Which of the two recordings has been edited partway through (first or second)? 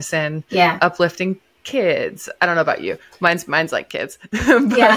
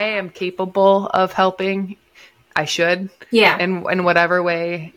second